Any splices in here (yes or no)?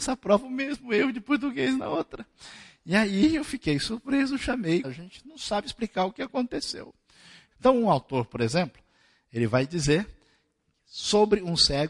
yes